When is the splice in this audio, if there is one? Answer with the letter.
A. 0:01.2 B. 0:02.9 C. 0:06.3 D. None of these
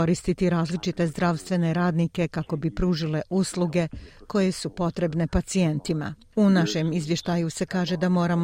C